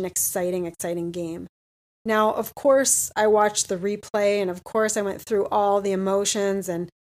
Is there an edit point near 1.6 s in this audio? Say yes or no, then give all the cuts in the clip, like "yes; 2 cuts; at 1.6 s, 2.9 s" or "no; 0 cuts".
no; 0 cuts